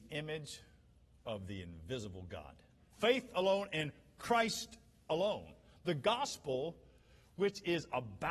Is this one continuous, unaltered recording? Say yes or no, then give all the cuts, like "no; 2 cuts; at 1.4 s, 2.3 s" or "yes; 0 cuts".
no; 1 cut; at 2.9 s